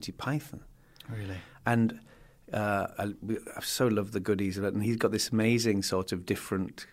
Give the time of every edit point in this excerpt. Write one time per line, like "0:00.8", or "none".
0:02.9